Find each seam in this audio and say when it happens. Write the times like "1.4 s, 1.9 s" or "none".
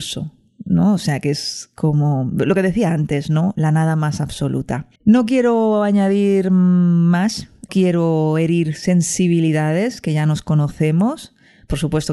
4.9 s